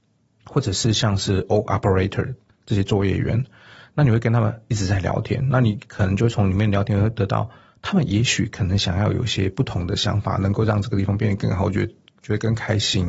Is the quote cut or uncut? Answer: uncut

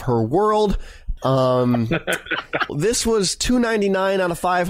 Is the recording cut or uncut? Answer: cut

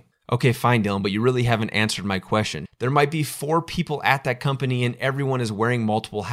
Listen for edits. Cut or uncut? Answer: cut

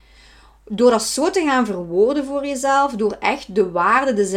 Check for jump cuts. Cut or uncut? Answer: uncut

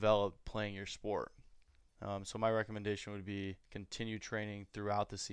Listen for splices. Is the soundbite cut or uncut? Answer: cut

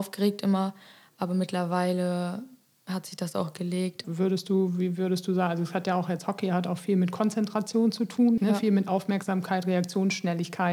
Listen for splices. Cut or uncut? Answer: cut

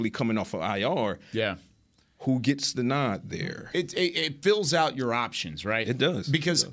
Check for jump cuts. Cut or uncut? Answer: uncut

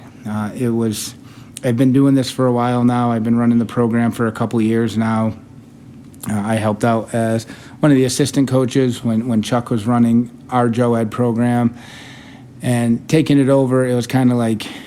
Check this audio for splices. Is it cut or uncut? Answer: uncut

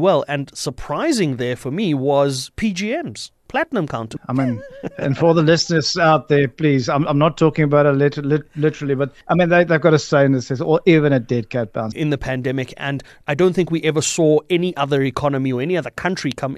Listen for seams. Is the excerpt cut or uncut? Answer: cut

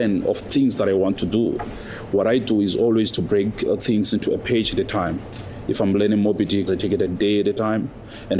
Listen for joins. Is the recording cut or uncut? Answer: cut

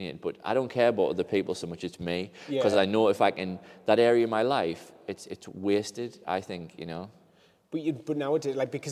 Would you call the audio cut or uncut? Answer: uncut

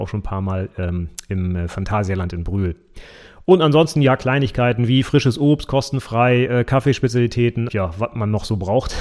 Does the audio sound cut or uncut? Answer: cut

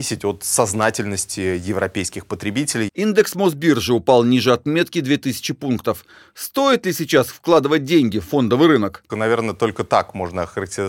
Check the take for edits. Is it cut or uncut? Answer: cut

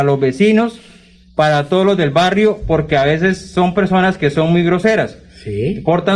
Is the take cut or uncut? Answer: uncut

